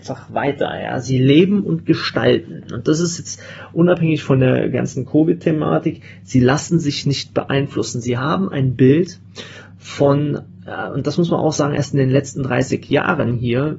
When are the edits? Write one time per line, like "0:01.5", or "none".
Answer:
none